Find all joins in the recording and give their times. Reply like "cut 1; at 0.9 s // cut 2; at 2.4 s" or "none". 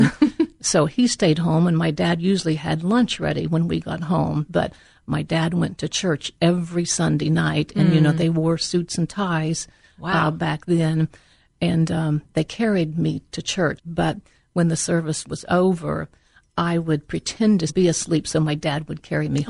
cut 1; at 13.8 s // cut 2; at 17.7 s